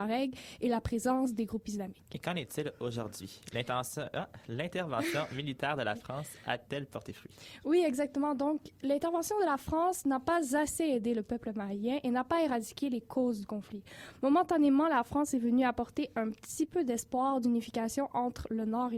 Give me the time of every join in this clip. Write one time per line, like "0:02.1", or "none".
none